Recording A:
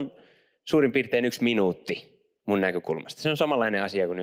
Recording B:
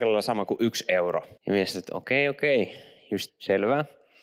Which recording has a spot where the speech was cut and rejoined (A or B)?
B